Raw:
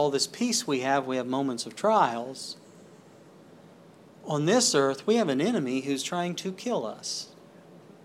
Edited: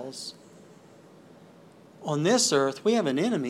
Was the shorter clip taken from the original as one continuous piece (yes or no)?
yes